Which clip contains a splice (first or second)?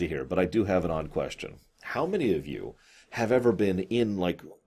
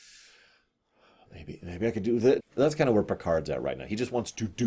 second